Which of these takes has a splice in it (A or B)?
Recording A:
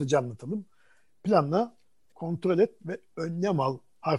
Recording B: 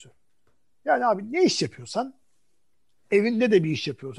A